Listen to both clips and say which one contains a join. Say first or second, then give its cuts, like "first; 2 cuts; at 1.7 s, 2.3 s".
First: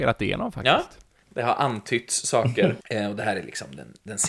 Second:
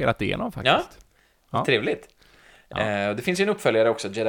first; 2 cuts; at 1.2 s, 2.8 s